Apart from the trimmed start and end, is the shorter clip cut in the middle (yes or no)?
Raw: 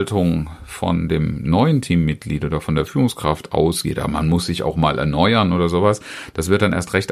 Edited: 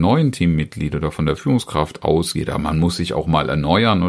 no